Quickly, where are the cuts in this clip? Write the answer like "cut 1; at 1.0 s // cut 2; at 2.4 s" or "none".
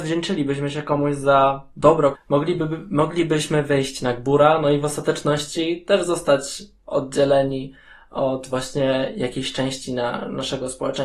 cut 1; at 2.1 s